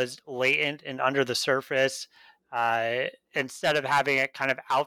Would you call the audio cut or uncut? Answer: uncut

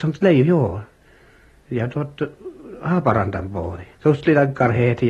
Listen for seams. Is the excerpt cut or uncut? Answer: cut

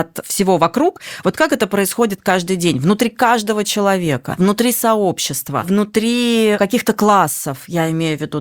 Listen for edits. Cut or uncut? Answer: uncut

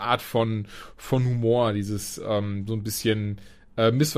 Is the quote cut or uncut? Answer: uncut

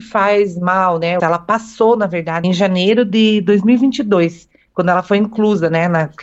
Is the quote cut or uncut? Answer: cut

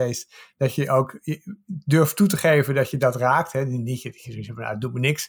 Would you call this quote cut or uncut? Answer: uncut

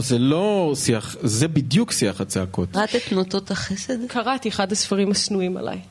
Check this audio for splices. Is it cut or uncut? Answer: cut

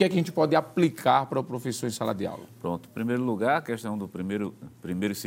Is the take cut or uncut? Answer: uncut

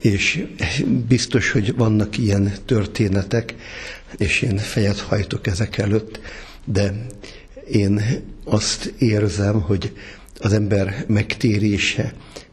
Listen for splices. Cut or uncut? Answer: uncut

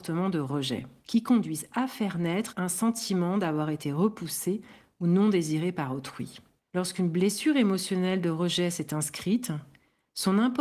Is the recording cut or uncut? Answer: cut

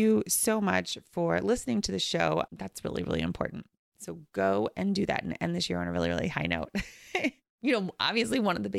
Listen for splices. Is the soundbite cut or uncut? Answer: cut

